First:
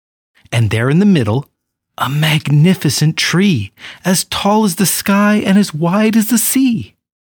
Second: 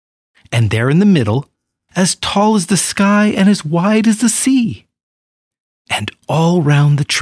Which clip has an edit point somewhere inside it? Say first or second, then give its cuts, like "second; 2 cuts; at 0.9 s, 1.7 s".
second; 1 cut; at 1.9 s